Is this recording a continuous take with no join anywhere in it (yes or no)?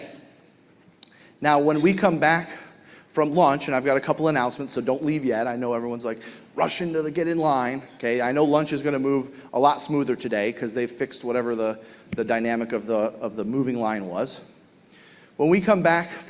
yes